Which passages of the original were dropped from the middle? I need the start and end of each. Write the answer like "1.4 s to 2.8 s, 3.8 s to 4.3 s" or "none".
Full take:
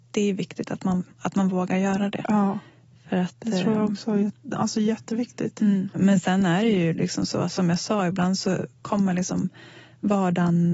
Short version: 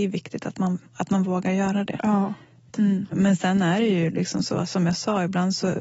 3.0 s to 5.5 s